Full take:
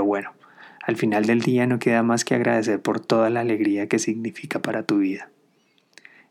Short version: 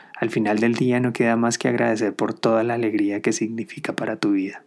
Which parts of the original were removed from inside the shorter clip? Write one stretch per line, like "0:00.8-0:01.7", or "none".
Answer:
none